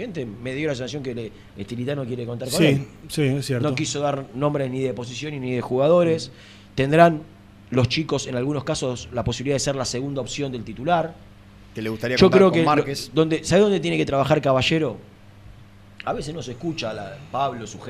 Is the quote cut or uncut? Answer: uncut